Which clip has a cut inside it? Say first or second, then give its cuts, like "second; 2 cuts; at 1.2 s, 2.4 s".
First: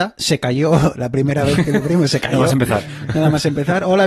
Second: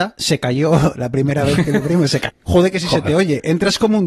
second; 1 cut; at 2.3 s